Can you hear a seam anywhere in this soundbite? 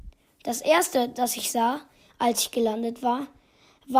no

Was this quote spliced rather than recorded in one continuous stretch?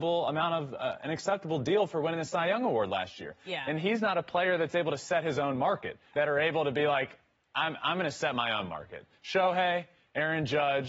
yes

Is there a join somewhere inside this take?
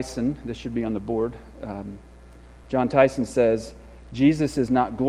no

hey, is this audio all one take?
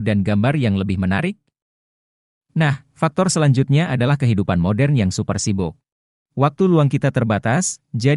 no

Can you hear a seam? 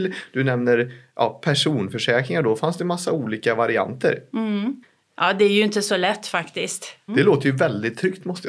yes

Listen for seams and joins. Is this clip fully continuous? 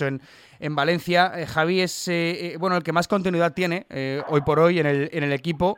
yes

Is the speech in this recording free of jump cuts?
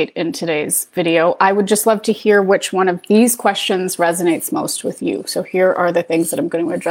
yes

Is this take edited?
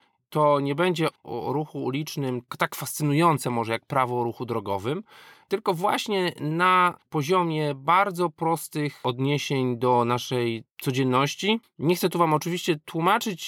yes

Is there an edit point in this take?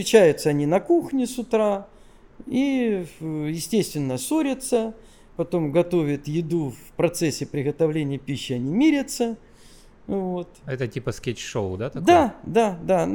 no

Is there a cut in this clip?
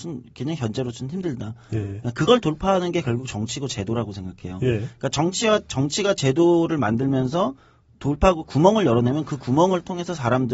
no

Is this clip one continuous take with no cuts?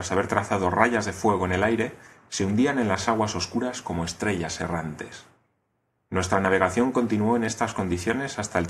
yes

